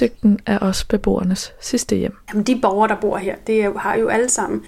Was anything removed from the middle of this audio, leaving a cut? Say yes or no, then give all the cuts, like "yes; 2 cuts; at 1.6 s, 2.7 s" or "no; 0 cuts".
yes; 1 cut; at 2.3 s